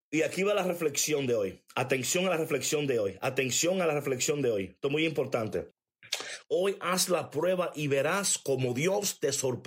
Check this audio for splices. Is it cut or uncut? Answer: cut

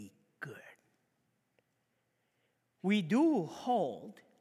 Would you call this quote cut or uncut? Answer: uncut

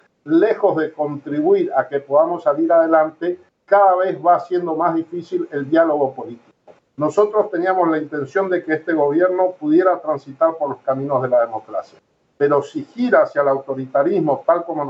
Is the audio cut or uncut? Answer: cut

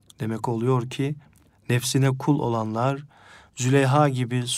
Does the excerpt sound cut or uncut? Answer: uncut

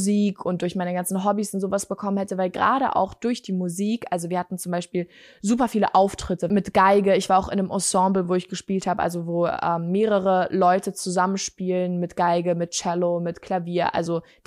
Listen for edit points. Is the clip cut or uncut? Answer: uncut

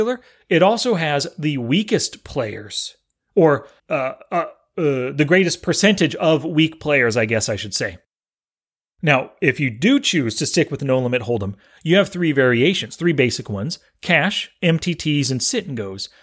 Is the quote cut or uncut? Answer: cut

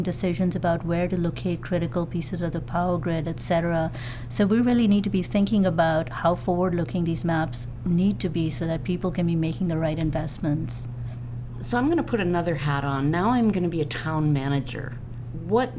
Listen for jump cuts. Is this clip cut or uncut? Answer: uncut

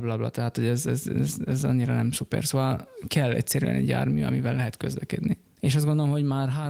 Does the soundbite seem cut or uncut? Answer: uncut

